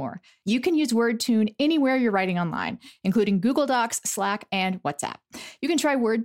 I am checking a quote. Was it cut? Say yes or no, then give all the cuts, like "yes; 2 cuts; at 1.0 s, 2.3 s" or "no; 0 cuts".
yes; 1 cut; at 4.5 s